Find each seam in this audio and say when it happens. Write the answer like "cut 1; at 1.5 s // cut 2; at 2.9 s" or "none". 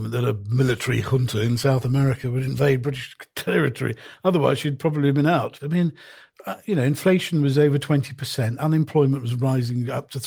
cut 1; at 5.6 s